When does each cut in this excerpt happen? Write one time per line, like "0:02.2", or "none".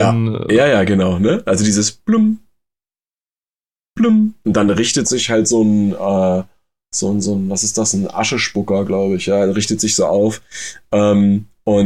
0:04.4